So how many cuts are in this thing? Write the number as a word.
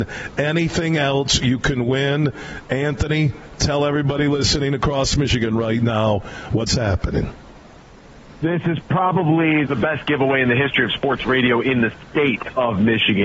one